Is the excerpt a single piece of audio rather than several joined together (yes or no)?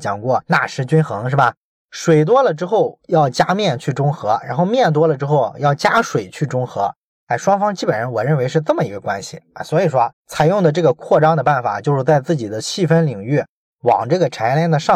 no